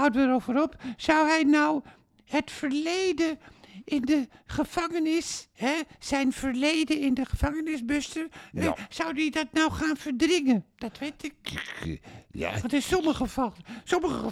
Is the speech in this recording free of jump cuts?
no; 1 cut; at 11.4 s

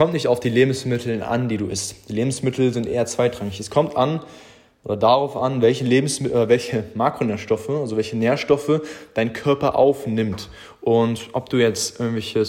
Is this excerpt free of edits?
yes; 0 cuts

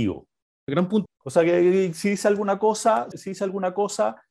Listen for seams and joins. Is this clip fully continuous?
no; 2 cuts; at 1.1 s, 3.1 s

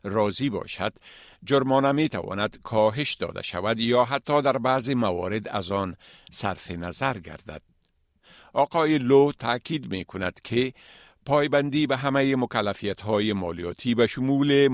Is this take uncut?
yes; 0 cuts

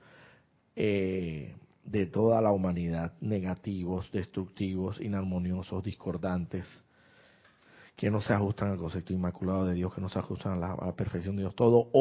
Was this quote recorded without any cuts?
yes; 0 cuts

